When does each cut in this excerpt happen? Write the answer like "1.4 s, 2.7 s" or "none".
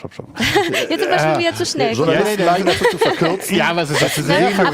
none